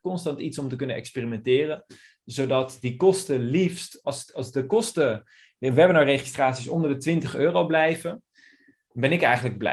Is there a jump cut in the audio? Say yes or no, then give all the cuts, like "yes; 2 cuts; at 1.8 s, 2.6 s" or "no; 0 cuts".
yes; 1 cut; at 4.0 s